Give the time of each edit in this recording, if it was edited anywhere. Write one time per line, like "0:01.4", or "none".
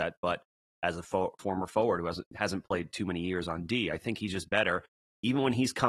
0:02.2